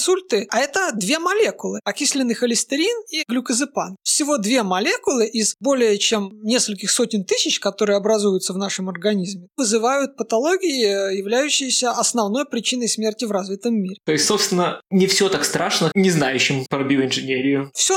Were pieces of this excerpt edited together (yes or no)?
yes